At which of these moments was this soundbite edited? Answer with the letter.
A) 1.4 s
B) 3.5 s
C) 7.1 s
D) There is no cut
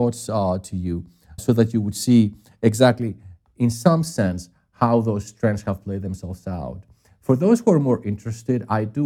A